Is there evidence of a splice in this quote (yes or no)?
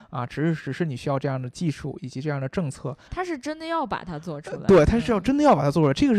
yes